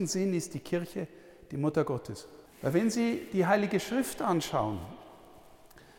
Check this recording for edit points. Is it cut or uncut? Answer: cut